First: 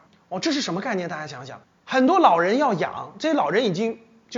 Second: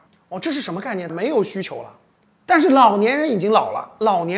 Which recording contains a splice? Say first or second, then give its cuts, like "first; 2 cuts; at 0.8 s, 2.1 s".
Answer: second; 1 cut; at 1.1 s